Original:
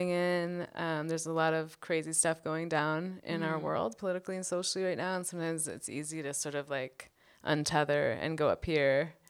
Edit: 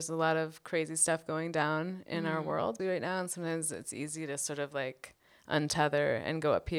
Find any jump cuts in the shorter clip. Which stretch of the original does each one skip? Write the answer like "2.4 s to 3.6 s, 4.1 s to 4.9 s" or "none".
4.0 s to 4.8 s